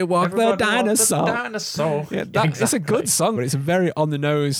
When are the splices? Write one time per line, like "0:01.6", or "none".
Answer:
0:03.4